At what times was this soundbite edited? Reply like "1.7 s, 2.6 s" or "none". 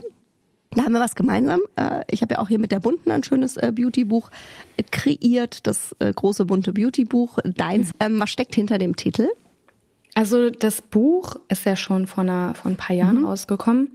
7.9 s